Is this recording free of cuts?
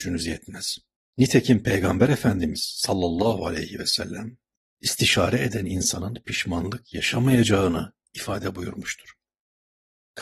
yes; 0 cuts

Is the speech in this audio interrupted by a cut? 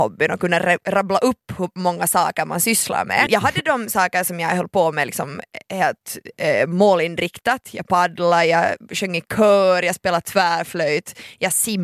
yes; 1 cut; at 3.3 s

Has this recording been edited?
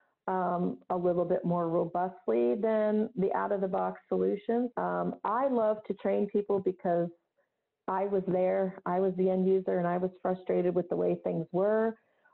yes; 1 cut; at 4.7 s

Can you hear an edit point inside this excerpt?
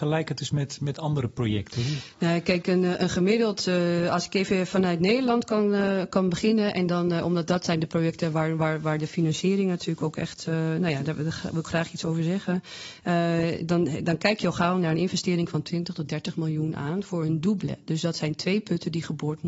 no; 0 cuts

